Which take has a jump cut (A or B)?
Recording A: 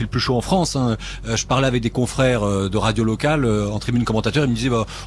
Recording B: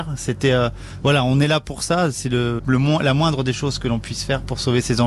B